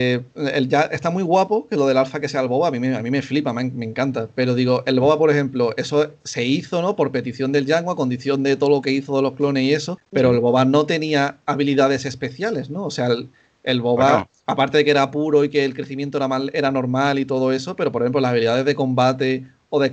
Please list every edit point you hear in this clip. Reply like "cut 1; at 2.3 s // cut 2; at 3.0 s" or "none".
none